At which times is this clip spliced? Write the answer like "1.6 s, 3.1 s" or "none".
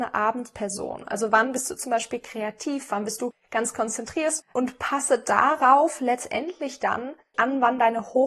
4.4 s, 7.3 s